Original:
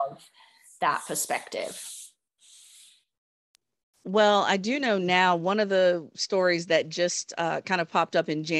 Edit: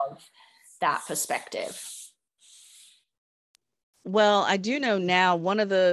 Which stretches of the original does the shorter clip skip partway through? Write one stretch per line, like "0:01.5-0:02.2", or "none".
none

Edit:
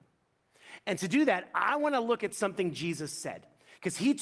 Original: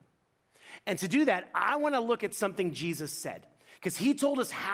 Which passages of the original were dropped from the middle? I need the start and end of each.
none

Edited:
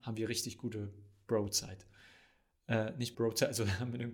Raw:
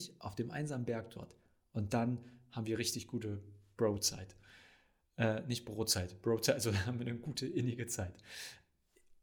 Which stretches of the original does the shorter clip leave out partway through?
0:05.6-0:06.2

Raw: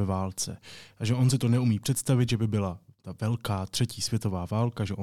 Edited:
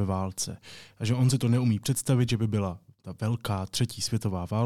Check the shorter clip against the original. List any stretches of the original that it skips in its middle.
none

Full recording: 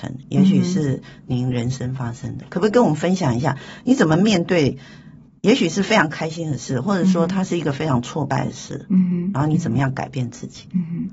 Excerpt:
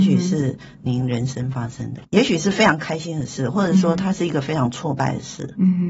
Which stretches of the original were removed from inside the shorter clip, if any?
0:02.5-0:05.4

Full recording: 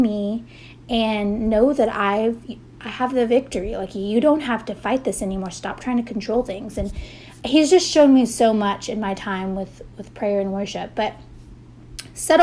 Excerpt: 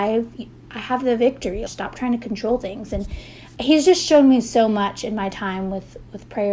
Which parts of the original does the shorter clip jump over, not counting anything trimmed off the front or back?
0:03.8-0:05.5

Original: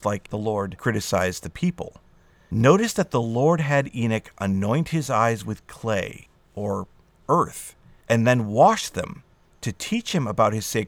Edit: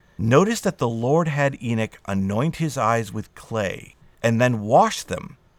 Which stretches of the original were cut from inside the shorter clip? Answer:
0:06.3-0:07.9

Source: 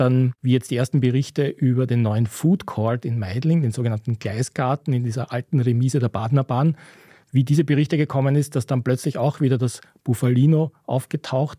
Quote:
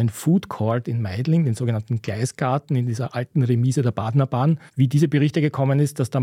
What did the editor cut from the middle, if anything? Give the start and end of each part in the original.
0:06.8-0:07.2

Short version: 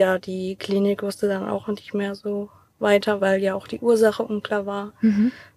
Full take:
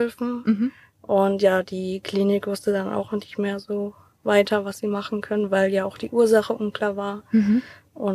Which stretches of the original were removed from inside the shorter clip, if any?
0:04.6-0:05.5

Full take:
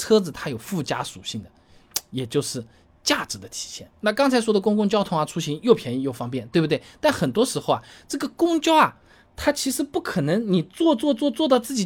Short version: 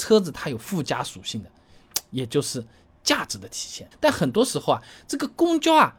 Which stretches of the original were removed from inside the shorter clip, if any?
0:03.9-0:06.9

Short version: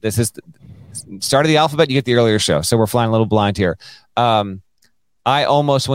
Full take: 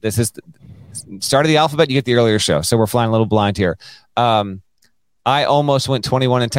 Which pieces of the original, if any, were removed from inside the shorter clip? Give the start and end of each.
none

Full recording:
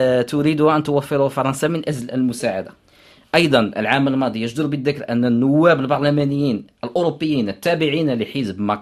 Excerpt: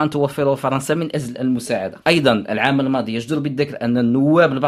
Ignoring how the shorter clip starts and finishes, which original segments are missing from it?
0:02.7-0:03.3

